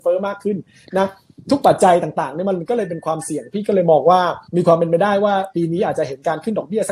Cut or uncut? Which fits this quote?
cut